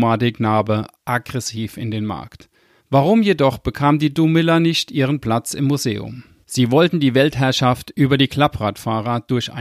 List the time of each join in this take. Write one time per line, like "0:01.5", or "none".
0:02.8
0:06.4